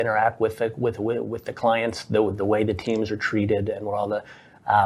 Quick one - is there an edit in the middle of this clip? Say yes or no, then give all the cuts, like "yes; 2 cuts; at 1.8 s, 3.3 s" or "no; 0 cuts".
no; 0 cuts